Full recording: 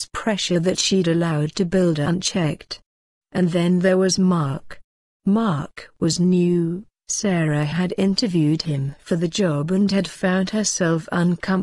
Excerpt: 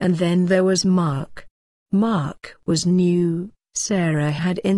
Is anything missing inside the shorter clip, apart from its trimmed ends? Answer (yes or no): no